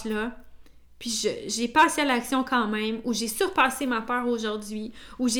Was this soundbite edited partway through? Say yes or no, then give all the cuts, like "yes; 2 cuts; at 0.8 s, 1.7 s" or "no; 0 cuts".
no; 0 cuts